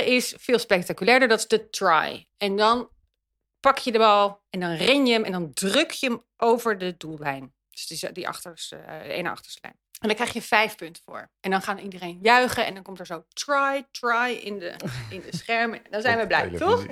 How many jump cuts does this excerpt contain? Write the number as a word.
one